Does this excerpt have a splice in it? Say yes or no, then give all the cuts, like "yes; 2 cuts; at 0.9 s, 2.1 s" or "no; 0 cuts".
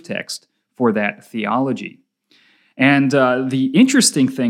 no; 0 cuts